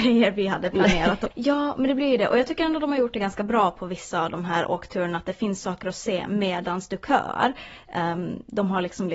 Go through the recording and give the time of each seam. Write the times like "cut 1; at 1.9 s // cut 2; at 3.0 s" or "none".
cut 1; at 1.3 s